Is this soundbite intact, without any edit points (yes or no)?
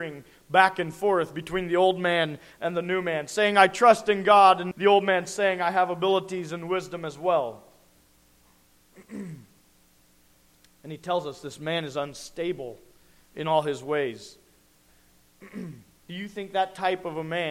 no